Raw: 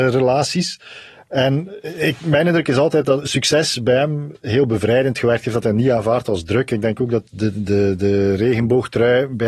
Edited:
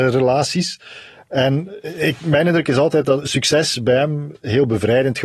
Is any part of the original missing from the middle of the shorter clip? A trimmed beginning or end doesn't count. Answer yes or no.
no